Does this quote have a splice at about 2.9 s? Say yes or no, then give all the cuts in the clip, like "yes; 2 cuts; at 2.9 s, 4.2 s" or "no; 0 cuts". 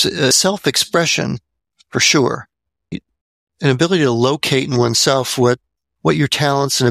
yes; 1 cut; at 2.9 s